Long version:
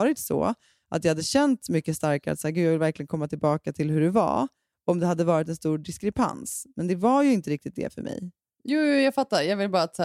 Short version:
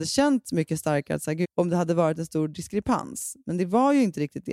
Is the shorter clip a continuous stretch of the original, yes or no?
no